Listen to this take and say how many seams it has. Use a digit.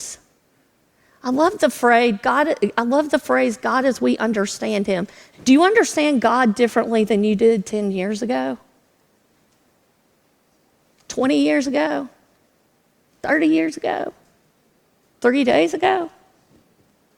1